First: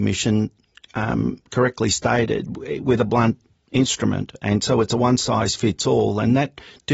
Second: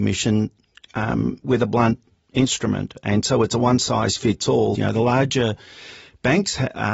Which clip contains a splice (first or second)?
second